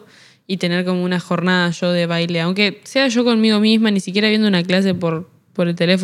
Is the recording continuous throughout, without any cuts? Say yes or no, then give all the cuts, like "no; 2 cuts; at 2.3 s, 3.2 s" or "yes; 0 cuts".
yes; 0 cuts